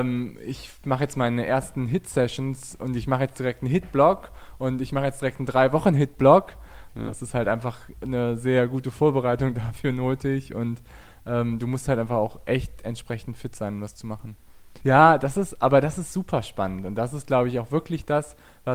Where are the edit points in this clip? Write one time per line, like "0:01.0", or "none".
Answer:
0:06.9
0:14.8